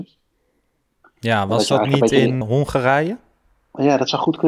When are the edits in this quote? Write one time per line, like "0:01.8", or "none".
0:02.4